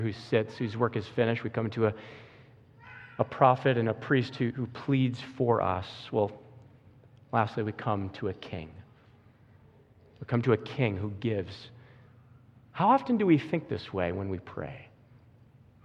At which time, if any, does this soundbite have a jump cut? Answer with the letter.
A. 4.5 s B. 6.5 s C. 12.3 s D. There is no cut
A